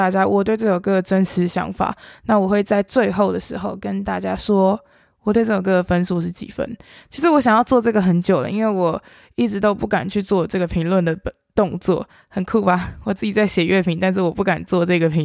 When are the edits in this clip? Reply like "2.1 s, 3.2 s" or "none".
none